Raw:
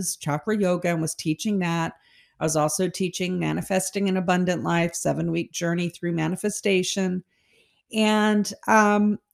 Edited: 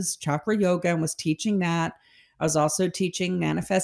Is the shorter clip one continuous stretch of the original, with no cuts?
yes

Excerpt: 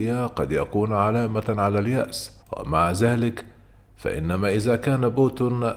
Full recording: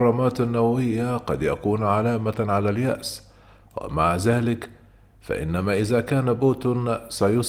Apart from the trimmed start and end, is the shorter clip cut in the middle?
yes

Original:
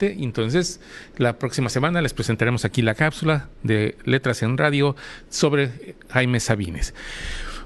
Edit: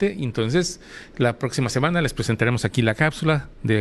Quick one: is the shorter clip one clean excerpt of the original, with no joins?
yes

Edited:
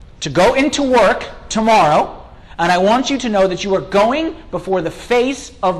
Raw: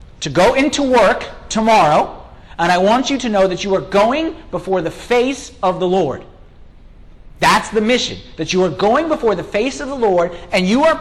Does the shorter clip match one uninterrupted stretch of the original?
yes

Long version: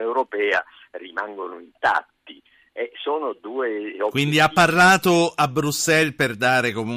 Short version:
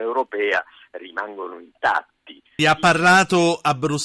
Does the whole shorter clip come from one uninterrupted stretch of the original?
no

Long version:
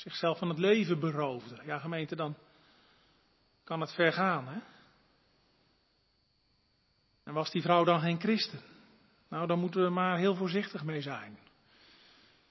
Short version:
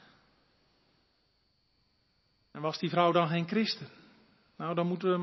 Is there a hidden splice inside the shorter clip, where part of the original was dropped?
no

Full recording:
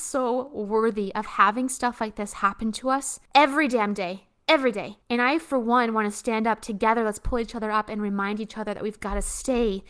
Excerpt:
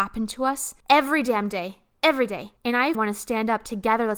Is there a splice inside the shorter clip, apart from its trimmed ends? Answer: yes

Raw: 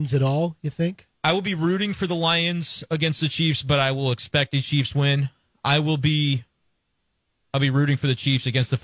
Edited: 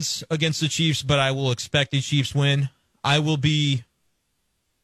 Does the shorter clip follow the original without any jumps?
yes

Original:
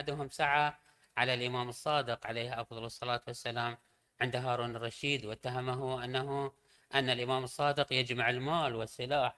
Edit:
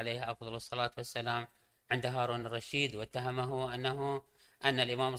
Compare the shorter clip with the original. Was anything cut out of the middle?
no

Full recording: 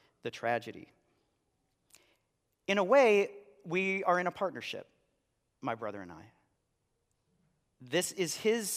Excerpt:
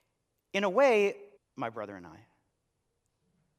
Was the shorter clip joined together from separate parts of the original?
yes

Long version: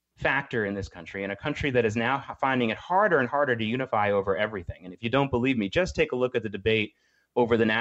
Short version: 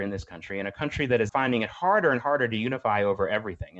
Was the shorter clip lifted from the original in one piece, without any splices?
no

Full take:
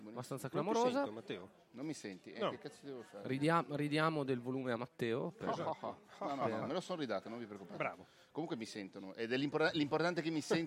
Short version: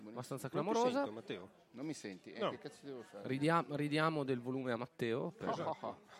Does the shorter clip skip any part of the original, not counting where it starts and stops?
no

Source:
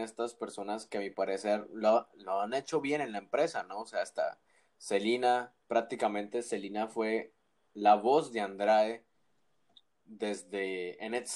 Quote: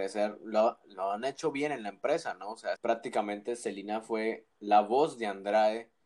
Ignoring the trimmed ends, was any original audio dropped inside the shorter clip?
yes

